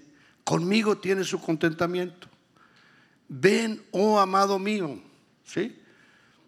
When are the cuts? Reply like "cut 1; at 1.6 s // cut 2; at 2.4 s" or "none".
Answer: cut 1; at 5.3 s